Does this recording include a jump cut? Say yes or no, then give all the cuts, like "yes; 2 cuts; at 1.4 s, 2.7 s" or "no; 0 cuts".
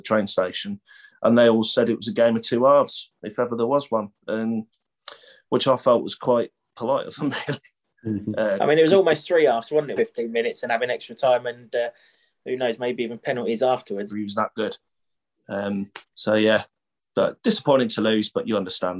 yes; 3 cuts; at 10.0 s, 14.1 s, 16.1 s